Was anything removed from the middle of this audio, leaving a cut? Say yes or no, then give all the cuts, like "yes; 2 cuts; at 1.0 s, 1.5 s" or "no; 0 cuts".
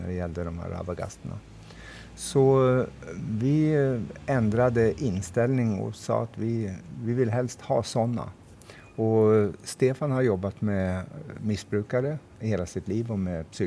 no; 0 cuts